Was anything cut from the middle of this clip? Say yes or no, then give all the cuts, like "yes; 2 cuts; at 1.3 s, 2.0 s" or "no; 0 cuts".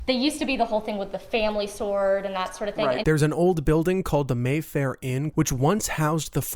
yes; 2 cuts; at 3.0 s, 5.3 s